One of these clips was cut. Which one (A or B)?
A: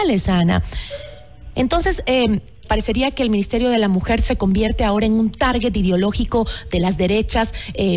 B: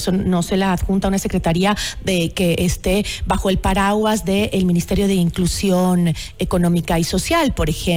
A